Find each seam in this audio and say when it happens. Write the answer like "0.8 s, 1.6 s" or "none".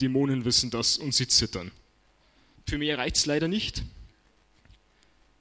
2.6 s

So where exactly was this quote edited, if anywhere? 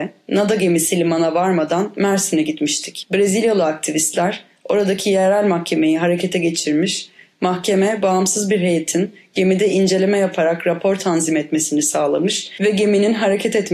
none

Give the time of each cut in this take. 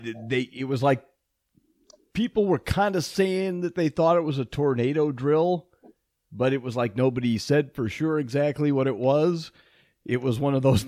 none

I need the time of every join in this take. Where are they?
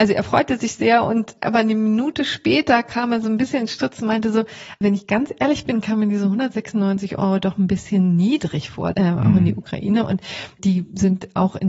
4.8 s, 8.9 s

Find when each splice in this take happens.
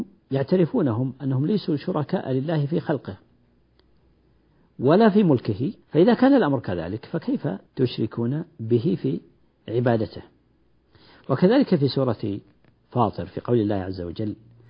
5.8 s, 7.7 s

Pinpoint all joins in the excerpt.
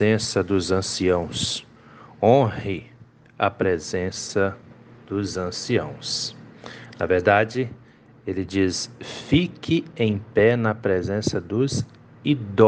none

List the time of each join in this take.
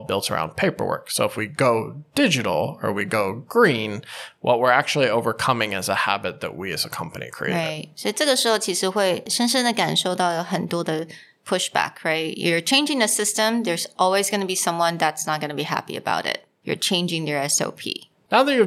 16.6 s

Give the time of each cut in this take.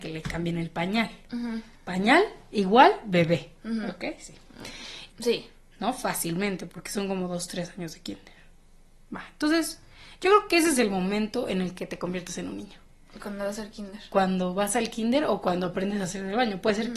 5.1 s

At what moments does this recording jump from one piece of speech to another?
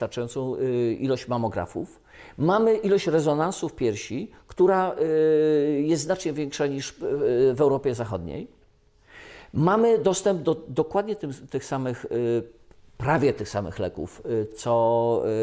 14.5 s

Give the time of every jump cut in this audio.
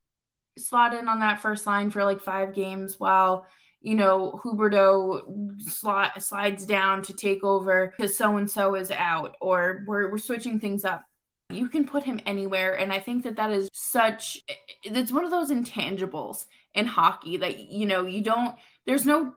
11.5 s, 13.7 s

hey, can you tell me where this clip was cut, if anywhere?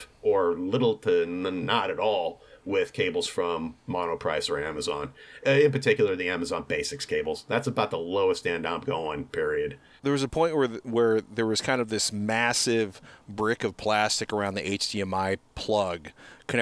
10.0 s

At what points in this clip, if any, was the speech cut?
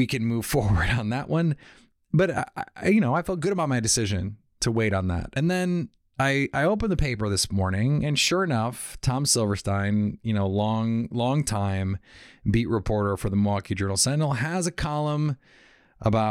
none

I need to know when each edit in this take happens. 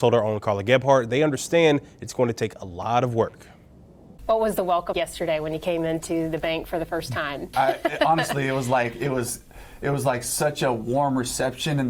4.9 s, 7.5 s

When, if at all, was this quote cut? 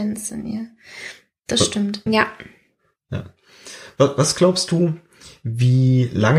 2.1 s

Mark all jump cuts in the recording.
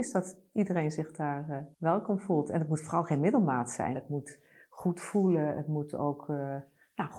1.7 s, 3.9 s

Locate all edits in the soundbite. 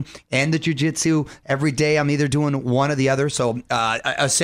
none

